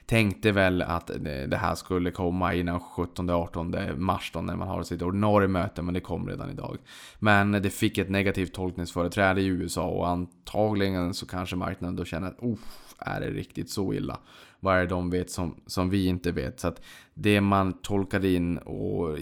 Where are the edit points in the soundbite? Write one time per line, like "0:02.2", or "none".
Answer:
none